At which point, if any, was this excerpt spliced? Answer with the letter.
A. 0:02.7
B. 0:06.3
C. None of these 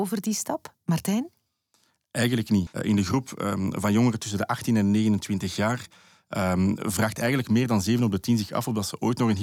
A